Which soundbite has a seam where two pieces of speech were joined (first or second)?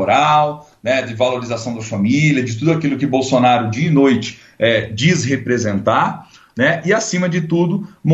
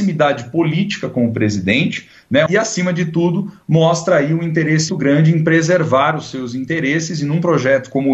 second